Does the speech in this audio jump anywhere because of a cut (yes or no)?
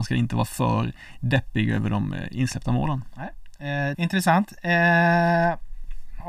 yes